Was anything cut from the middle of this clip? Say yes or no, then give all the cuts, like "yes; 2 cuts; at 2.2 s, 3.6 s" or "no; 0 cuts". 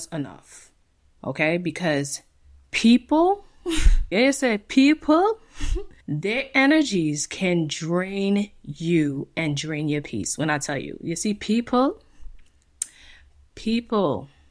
yes; 2 cuts; at 4.1 s, 6.0 s